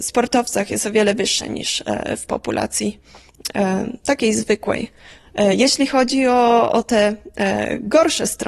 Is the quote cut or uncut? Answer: uncut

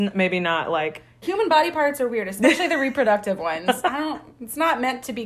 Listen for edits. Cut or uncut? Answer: cut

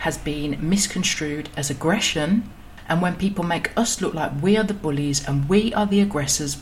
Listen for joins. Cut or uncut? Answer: uncut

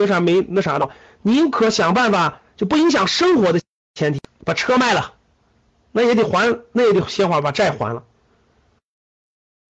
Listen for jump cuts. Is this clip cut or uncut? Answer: uncut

